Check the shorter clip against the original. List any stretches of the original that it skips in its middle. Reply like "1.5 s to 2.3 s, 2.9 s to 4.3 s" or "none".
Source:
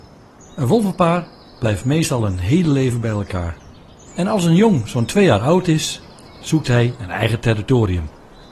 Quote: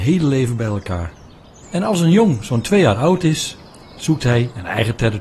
none